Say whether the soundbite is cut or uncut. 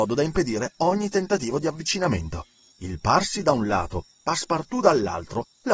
cut